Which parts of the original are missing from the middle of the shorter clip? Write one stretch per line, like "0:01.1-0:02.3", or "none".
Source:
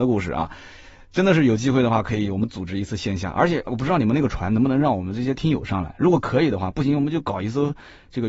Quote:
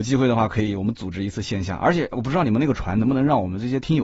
none